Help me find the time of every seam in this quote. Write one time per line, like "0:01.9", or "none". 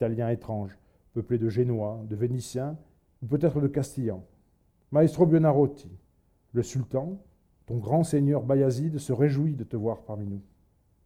0:04.8